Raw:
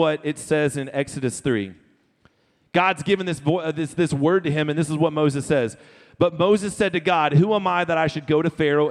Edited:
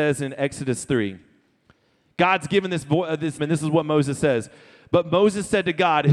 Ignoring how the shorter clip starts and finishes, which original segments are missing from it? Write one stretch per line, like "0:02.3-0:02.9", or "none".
0:03.9-0:04.7

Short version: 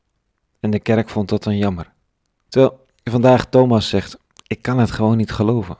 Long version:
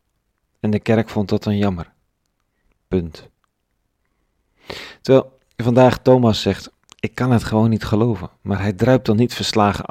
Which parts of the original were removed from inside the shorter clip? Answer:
0:02.5-0:05.0

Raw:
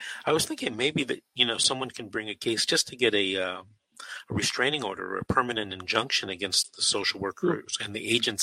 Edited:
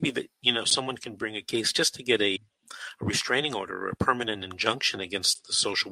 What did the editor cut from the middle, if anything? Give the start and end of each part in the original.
0:03.3-0:03.6

